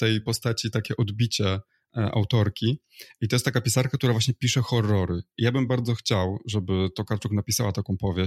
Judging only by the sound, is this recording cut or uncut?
cut